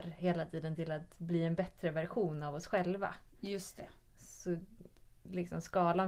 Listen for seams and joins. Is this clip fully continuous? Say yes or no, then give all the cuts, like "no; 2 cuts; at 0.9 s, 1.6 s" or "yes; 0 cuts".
yes; 0 cuts